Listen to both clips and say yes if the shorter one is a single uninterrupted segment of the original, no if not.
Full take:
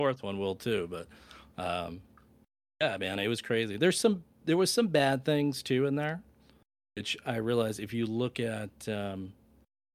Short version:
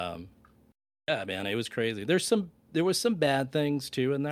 yes